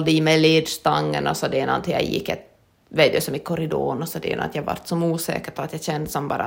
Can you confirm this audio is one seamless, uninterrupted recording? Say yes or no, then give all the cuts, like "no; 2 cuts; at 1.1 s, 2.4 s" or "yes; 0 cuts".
yes; 0 cuts